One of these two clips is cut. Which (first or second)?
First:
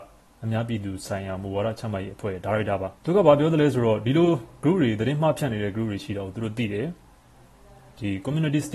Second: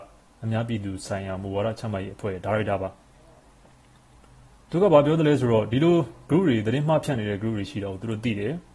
first